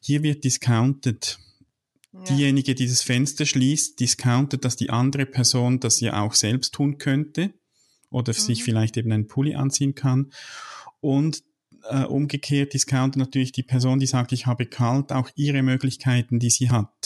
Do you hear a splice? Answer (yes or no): no